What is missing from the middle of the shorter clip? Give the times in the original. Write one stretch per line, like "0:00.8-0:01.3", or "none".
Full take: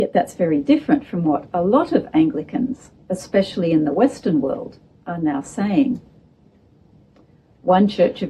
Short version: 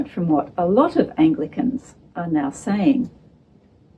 0:03.1-0:05.0